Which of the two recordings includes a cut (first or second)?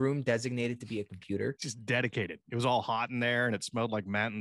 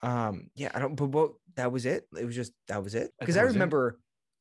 second